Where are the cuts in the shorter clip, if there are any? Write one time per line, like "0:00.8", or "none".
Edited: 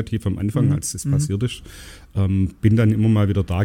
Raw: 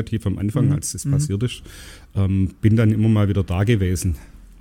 none

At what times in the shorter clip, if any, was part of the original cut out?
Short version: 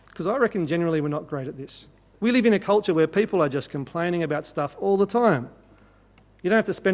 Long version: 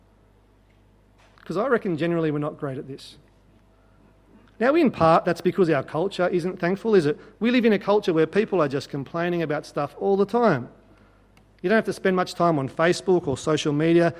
0:02.1

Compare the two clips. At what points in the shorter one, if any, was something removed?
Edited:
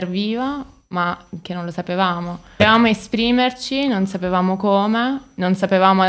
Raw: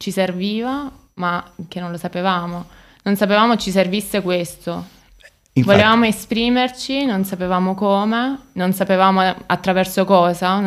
0:02.6

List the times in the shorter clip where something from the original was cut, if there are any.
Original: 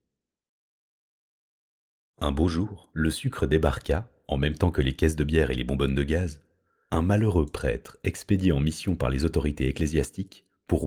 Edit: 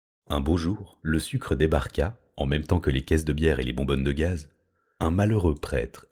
none

